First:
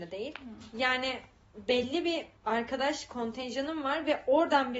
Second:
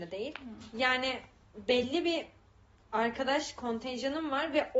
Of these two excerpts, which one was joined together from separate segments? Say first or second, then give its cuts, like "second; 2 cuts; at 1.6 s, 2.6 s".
first; 1 cut; at 2.4 s